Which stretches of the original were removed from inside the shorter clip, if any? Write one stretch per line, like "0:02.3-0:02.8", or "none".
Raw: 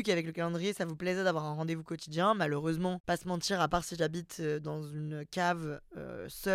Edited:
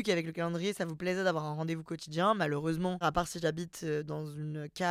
0:03.0-0:03.6